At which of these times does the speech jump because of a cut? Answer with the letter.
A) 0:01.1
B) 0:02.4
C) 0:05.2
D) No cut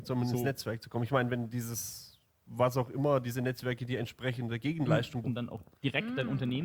C